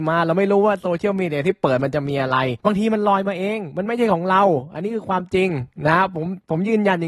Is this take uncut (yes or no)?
no